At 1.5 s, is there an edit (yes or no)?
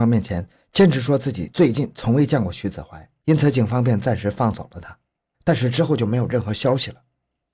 no